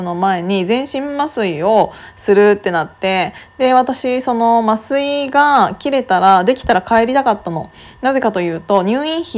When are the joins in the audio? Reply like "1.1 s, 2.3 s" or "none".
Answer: none